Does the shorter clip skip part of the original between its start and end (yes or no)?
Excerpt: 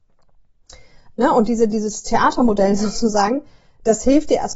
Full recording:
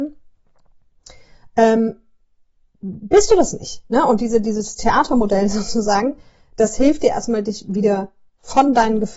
yes